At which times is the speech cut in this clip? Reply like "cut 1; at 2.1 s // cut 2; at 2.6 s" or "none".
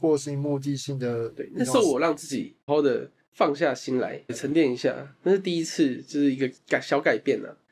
cut 1; at 2.7 s // cut 2; at 4.3 s